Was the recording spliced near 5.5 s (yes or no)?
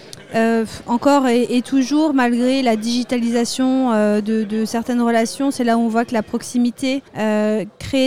no